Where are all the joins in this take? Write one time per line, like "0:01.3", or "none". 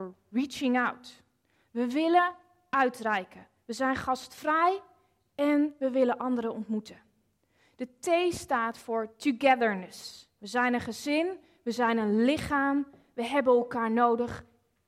0:10.4

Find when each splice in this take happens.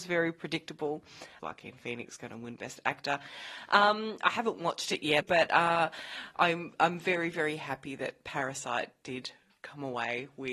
0:01.4
0:05.2

